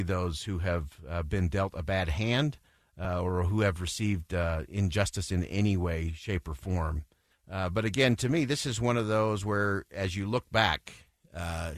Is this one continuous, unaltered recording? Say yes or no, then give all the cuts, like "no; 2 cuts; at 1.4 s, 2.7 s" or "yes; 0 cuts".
no; 1 cut; at 7.3 s